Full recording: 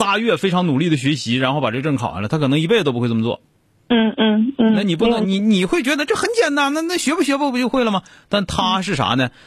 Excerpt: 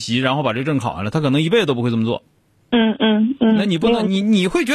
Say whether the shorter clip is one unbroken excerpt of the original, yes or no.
yes